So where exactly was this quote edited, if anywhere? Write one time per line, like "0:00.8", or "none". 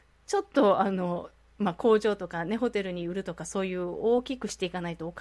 none

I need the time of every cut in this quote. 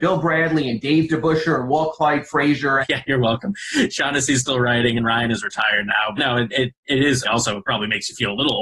0:02.8
0:06.2
0:07.2

